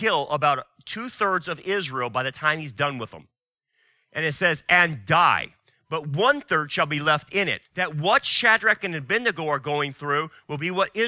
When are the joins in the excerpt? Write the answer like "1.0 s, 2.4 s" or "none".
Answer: 7.6 s, 8.8 s